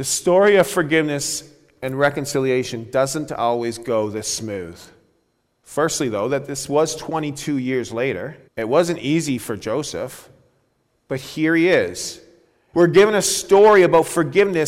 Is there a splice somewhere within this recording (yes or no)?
yes